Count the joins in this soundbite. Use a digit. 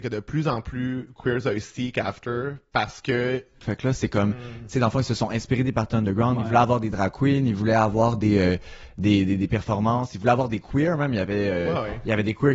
1